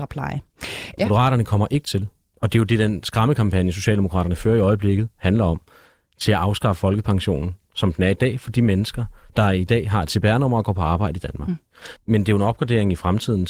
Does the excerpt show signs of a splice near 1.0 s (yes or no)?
yes